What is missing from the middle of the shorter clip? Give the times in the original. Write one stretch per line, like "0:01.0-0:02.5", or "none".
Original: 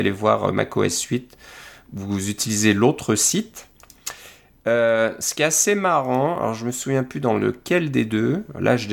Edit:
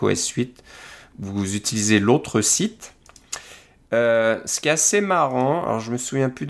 none

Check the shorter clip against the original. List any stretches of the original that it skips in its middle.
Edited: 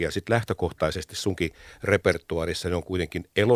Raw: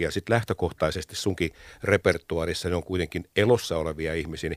none

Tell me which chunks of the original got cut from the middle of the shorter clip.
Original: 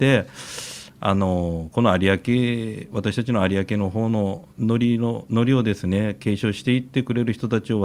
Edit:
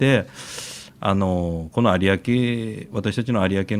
none

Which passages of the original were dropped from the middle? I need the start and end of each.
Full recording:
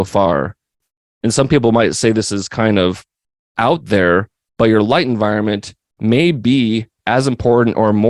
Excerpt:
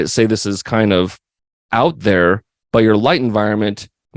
none

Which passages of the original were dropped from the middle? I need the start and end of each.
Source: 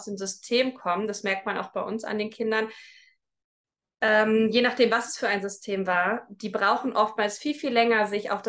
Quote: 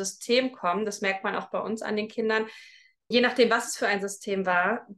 0:03.3-0:04.5

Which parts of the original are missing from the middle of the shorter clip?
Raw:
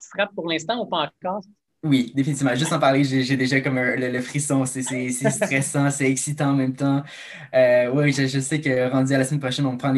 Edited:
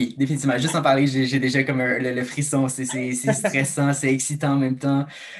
none

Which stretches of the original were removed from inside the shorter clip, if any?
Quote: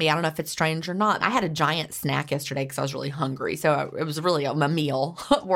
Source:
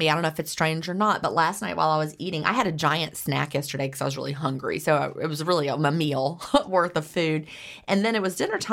0:01.2-0:02.4

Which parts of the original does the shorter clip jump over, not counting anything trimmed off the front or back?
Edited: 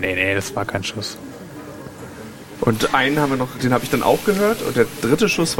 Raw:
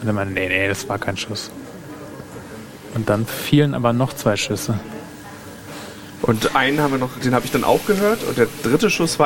0:02.9-0:06.2

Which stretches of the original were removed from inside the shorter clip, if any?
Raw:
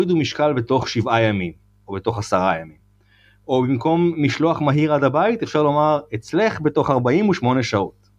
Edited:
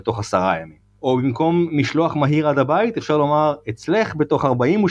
0:02.9-0:03.4

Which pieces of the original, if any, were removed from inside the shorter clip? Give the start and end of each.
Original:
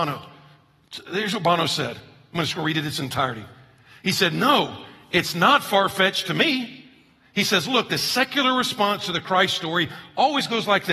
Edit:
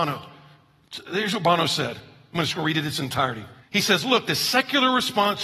0:03.6-0:07.2

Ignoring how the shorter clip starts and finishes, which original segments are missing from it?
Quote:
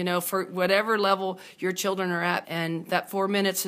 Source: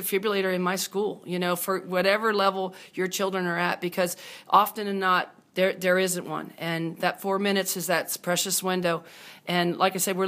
0:03.8-0:06.5

